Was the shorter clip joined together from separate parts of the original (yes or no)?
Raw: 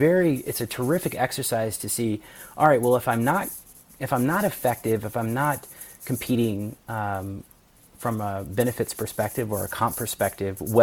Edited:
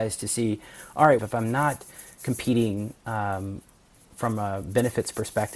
yes